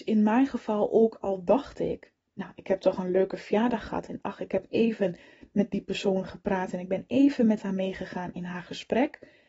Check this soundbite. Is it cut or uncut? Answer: uncut